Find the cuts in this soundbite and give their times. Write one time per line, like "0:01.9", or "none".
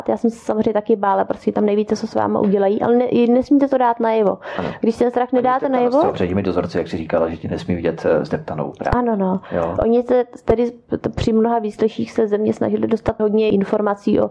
0:09.8
0:13.2